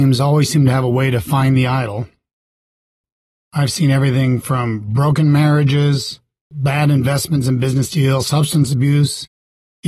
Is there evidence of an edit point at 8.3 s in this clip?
no; 1 cut; at 6.5 s

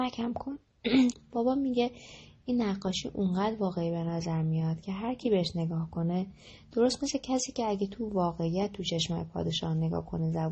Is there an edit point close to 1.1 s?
yes; 1 cut; at 1.1 s

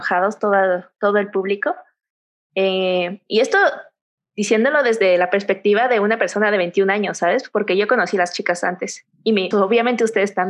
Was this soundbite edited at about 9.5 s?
yes; 1 cut; at 9.5 s

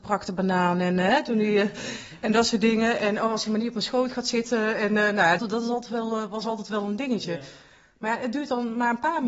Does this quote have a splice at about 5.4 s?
yes; 1 cut; at 5.4 s

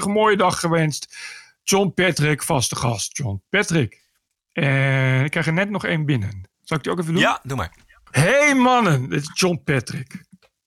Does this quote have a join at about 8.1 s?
yes; 2 cuts; at 6.5 s, 8.1 s

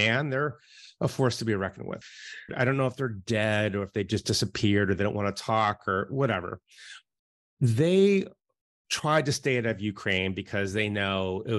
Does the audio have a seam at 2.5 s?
yes; 1 cut; at 2.5 s

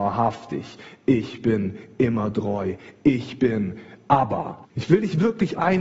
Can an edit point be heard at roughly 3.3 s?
no; 1 cut; at 4.6 s

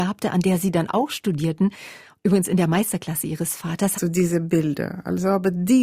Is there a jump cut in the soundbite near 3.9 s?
yes; 1 cut; at 3.9 s

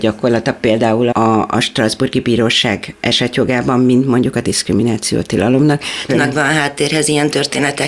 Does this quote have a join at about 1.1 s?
yes; 2 cuts; at 1.1 s, 6.1 s

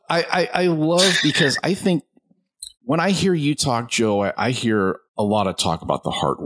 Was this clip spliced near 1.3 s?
no; 2 cuts; at 2.7 s, 5.1 s

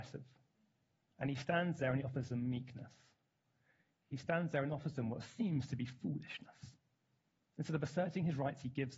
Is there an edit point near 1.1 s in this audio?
yes; 1 cut; at 1.1 s

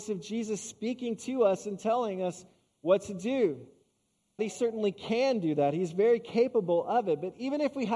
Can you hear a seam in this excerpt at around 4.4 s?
yes; 1 cut; at 4.4 s

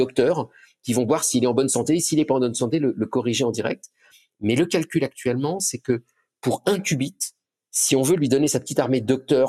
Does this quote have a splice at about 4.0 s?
no; 0 cuts

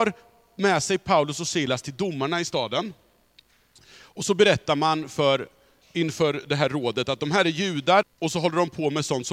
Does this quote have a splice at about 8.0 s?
yes; 1 cut; at 8.0 s

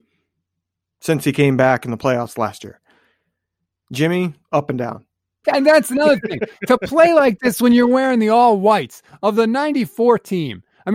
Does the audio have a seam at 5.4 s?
yes; 1 cut; at 5.4 s

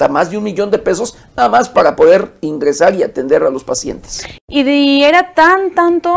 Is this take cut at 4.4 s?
yes; 1 cut; at 4.4 s

